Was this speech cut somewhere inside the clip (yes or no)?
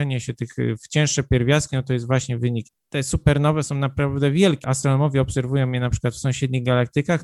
yes